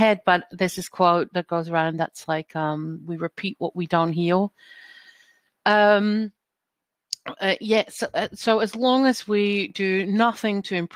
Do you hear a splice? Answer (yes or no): yes